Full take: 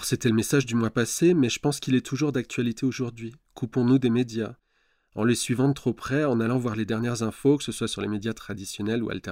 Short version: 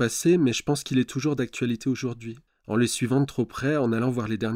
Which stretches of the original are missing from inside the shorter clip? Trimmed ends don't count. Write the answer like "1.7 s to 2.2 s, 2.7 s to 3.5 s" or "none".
3.4 s to 5.0 s